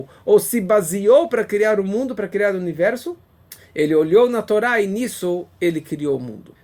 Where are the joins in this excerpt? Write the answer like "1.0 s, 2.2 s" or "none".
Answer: none